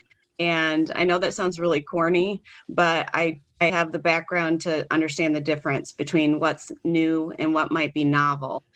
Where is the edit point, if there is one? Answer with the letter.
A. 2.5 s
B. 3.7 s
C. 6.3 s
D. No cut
B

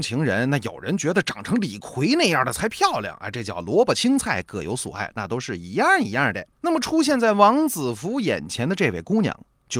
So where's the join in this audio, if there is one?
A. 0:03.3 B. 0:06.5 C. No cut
B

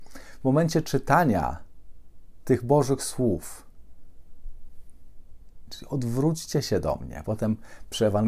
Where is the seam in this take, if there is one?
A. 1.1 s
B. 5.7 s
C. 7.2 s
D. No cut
B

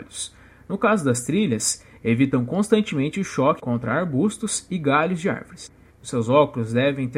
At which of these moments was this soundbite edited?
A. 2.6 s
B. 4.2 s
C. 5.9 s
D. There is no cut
C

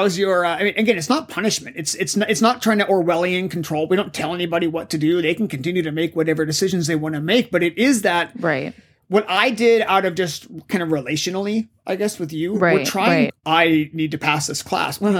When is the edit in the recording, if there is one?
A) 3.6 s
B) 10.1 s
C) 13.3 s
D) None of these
C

